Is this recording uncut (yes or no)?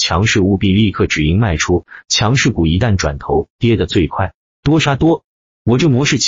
yes